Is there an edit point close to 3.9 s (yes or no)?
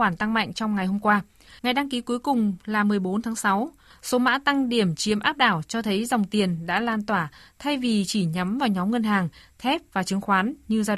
yes